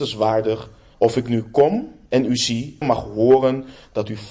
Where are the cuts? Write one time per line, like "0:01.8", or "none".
0:00.9
0:02.8